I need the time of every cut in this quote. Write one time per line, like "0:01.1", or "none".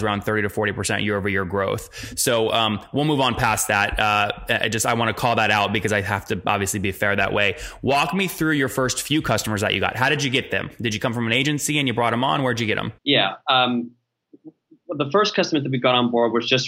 0:13.0